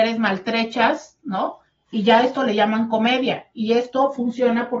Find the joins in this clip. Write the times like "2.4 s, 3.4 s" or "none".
none